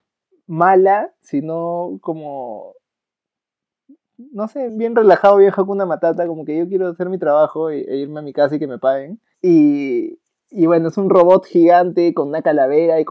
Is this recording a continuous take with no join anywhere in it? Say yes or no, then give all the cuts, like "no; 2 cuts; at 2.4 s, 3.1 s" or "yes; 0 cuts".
no; 2 cuts; at 4.7 s, 9.3 s